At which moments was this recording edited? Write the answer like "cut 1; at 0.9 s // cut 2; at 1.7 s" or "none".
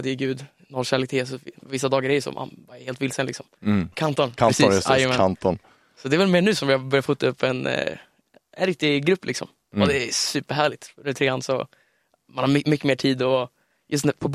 cut 1; at 3.9 s